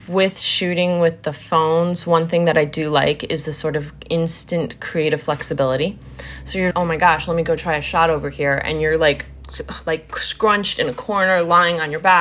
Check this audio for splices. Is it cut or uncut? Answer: cut